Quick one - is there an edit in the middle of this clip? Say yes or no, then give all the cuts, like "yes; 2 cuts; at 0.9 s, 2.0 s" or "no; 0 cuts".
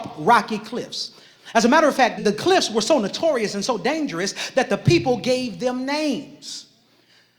yes; 1 cut; at 2.2 s